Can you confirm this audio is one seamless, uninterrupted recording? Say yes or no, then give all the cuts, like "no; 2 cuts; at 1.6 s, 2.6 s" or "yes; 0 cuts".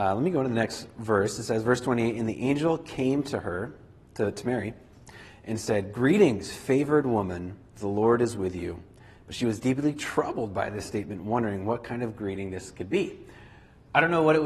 yes; 0 cuts